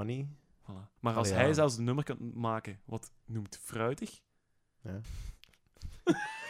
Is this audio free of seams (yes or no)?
no